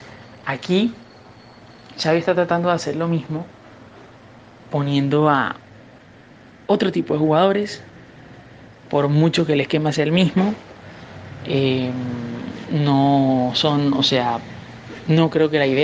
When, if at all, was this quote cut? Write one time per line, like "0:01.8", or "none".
none